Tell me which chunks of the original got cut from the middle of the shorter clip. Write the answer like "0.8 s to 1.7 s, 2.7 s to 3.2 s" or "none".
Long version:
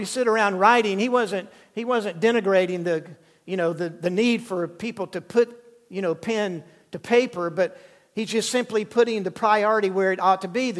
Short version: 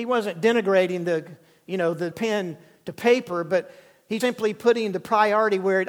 3.9 s to 6.2 s, 8.3 s to 8.5 s